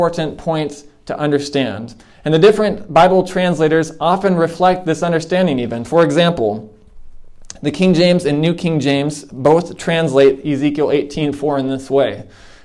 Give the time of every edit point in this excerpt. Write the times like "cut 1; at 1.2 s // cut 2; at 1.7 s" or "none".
none